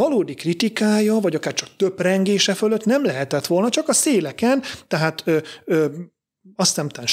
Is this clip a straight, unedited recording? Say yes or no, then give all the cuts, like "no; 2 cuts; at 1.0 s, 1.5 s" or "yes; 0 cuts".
yes; 0 cuts